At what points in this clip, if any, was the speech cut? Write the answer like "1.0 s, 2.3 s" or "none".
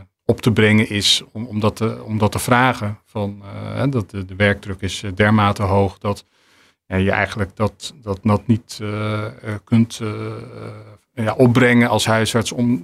none